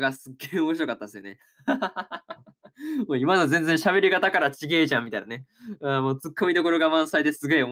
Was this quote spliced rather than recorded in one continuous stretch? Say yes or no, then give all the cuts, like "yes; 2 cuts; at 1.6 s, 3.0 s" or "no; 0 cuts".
no; 0 cuts